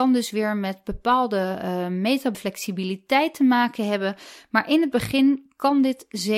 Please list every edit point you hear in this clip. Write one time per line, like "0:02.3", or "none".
0:02.3